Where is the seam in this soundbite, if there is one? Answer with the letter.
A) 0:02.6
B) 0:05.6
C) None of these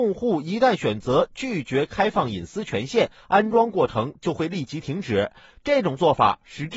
C